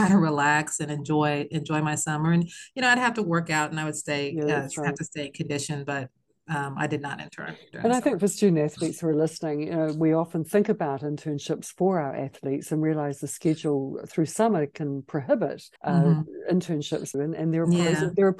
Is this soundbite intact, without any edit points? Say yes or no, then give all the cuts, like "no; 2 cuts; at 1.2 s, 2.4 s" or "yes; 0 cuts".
no; 2 cuts; at 15.8 s, 17.1 s